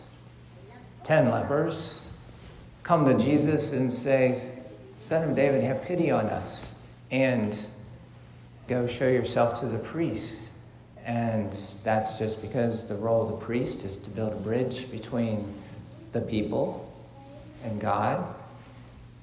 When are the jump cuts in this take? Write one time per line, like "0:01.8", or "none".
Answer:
0:08.7